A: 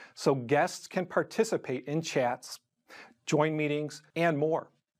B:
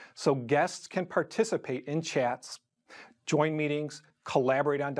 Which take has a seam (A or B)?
A